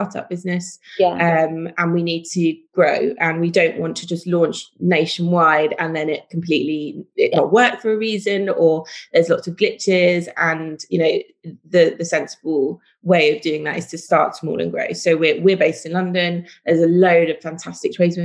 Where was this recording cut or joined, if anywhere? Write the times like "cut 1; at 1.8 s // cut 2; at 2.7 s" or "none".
none